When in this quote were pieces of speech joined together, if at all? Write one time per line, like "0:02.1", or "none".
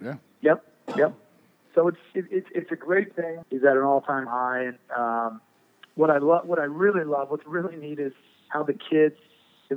0:03.4